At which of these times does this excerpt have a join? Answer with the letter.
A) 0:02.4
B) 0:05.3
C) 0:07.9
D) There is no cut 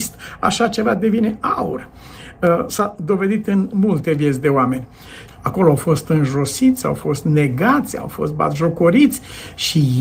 B